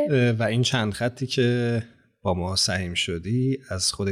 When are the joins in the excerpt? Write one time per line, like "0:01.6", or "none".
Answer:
none

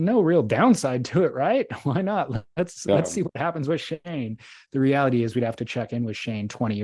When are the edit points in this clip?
none

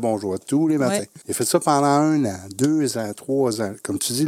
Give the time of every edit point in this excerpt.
0:01.2

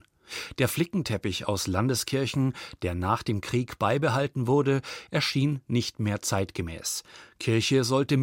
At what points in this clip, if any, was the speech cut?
none

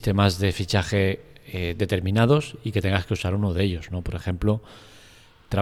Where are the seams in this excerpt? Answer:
none

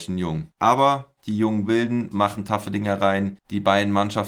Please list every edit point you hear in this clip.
0:02.1

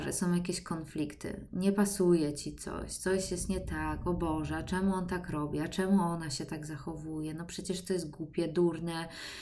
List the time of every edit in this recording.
none

